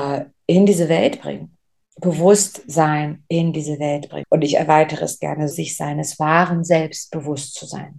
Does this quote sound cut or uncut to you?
cut